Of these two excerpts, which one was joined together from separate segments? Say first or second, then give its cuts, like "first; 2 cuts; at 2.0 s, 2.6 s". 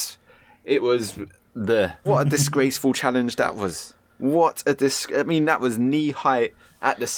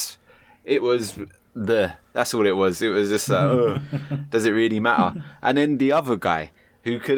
first; 1 cut; at 2.0 s